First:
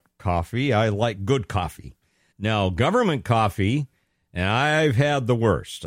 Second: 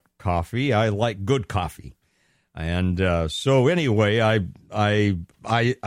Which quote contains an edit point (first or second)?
first